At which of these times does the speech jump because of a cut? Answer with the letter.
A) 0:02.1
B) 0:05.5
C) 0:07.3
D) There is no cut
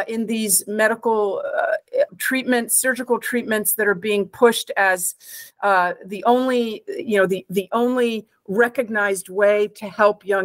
A